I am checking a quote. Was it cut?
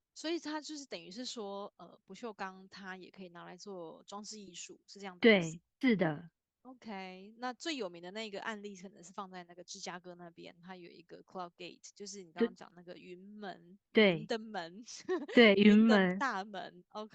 yes; 2 cuts; at 5.8 s, 13.8 s

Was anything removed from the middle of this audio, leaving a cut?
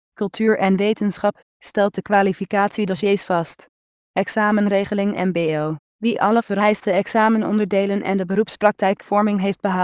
yes; 3 cuts; at 1.5 s, 3.9 s, 5.9 s

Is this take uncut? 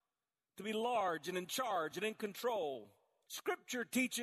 no; 1 cut; at 3.3 s

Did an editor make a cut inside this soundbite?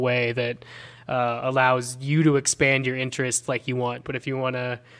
yes; 1 cut; at 4.0 s

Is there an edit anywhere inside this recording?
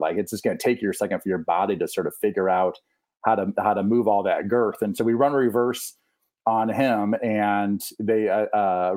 no; 0 cuts

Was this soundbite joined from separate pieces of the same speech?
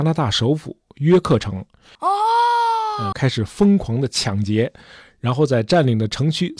yes; 2 cuts; at 2.0 s, 3.1 s

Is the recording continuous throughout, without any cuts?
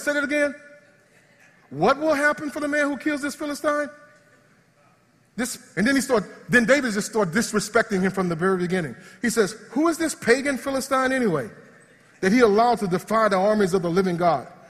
yes; 0 cuts

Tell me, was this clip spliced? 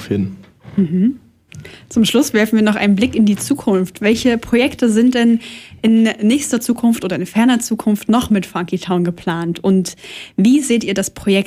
no; 0 cuts

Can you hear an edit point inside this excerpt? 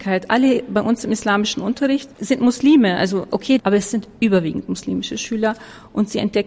yes; 2 cuts; at 2.1 s, 3.6 s

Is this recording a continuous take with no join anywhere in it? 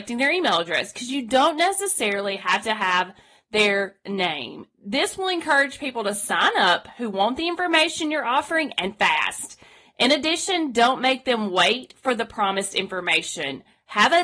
yes; 0 cuts

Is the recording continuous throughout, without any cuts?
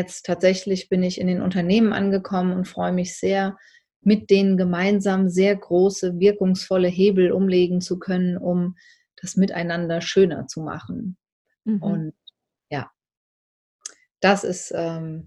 yes; 0 cuts

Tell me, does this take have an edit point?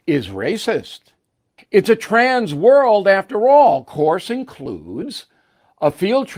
yes; 1 cut; at 1.6 s

